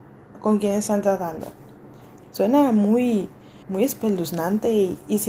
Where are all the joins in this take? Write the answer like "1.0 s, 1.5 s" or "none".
2.2 s, 3.6 s